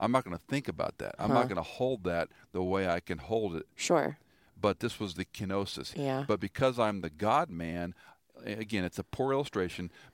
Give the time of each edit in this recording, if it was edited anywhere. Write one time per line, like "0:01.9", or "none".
0:03.7
0:05.9